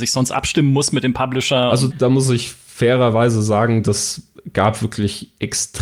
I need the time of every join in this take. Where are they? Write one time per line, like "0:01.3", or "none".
0:01.9